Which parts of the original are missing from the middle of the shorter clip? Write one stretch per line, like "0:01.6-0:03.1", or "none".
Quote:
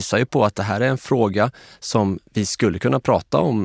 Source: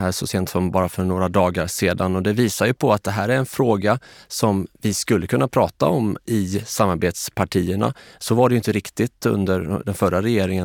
none